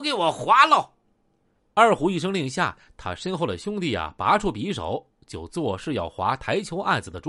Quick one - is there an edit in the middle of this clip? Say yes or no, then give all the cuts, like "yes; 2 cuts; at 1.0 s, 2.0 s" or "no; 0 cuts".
no; 0 cuts